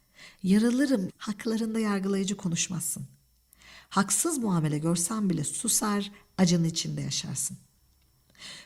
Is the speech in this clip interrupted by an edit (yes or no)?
yes